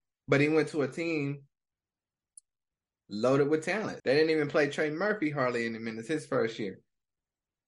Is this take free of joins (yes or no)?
no